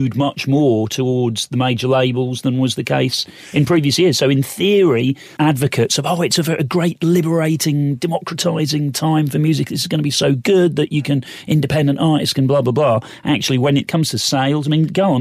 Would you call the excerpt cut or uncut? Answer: cut